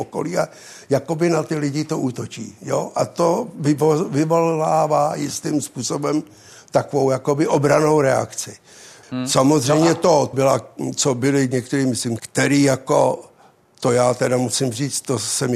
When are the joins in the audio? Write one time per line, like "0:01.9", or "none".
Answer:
0:09.0
0:10.3
0:12.2